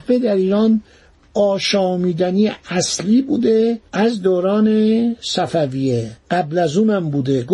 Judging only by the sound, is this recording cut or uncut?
cut